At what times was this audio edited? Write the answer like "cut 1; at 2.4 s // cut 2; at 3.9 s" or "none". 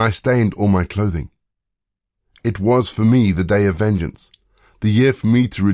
none